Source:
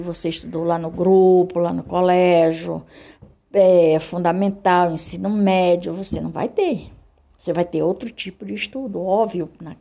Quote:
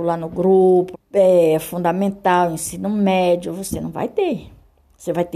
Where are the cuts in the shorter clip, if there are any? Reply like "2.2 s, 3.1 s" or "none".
0.9 s

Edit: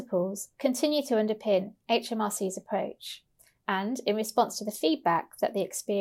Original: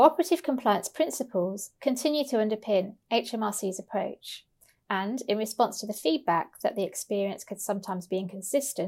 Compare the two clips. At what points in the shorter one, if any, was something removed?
none

